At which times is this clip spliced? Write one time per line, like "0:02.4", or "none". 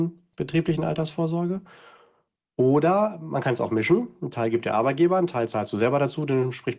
none